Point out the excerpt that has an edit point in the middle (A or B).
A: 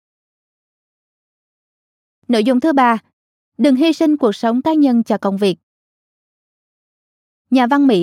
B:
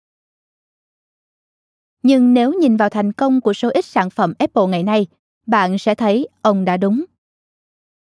B